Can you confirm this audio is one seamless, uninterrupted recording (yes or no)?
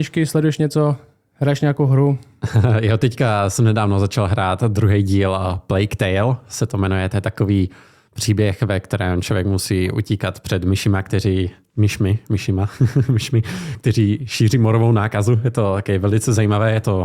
yes